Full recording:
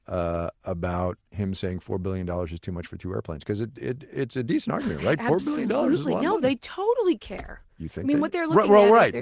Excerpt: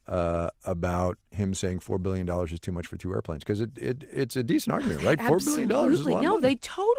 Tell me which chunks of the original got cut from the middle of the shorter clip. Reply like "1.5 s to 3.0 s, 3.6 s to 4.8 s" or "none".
none